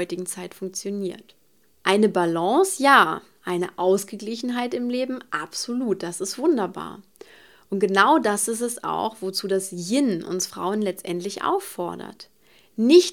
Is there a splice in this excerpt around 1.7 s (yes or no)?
no